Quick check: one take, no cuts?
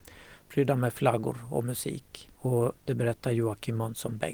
no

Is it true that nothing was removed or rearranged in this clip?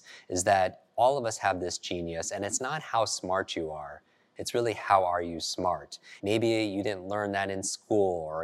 no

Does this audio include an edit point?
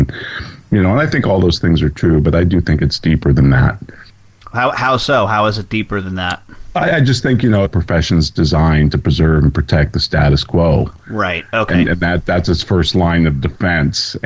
yes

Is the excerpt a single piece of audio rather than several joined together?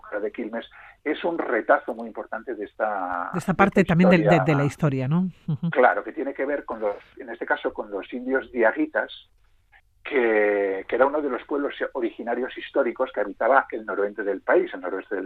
yes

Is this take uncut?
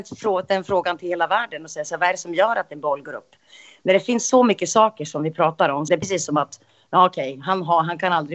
no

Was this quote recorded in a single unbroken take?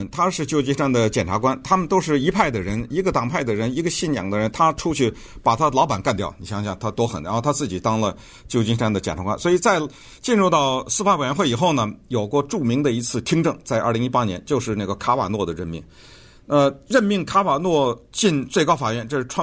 yes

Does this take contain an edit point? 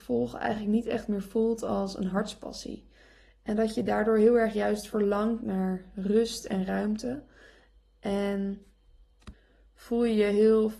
no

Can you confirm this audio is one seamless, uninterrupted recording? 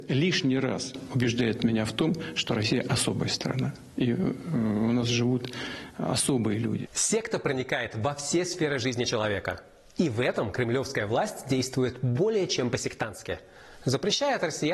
yes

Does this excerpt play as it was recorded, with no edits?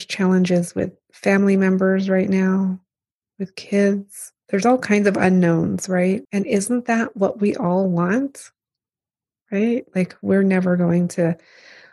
no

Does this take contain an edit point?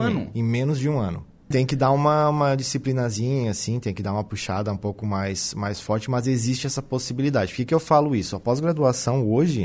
yes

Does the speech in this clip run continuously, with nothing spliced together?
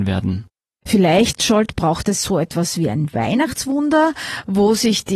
yes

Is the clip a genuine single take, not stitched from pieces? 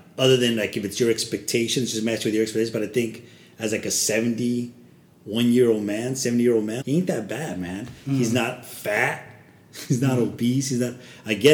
no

